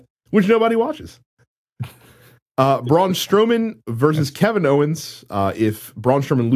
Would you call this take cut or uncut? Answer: uncut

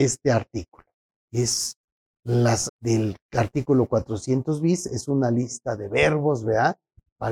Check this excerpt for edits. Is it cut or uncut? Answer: cut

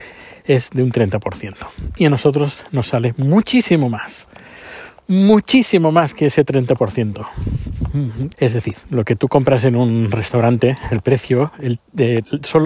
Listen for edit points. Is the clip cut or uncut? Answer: cut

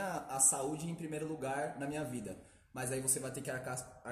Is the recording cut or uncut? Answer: uncut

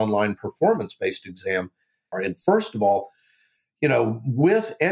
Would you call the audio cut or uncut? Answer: cut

